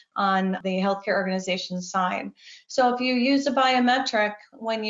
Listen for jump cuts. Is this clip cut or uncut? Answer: uncut